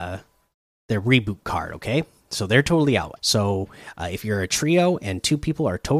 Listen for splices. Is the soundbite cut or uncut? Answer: cut